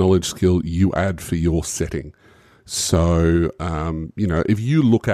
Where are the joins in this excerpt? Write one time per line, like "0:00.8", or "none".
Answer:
none